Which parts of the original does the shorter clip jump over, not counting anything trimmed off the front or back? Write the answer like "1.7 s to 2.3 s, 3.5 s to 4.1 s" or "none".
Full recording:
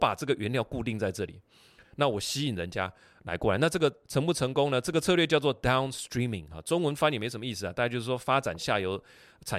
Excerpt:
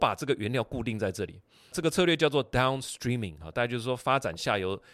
1.7 s to 4.8 s, 6.6 s to 7.7 s